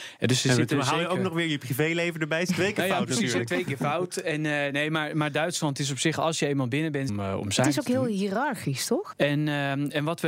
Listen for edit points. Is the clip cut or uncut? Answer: cut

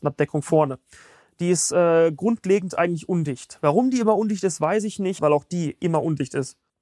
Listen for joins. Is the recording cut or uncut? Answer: cut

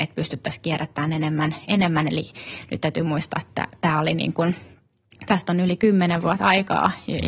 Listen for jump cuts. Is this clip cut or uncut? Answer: uncut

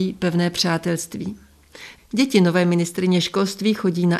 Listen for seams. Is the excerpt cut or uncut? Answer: cut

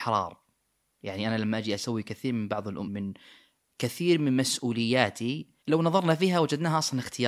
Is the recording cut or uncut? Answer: cut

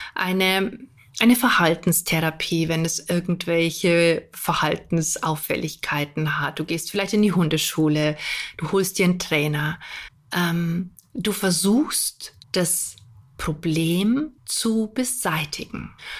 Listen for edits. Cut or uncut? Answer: cut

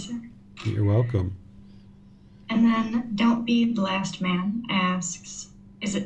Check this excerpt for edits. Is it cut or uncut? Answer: uncut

